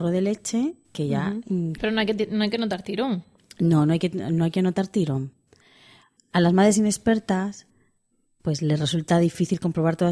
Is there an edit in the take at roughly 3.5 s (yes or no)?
no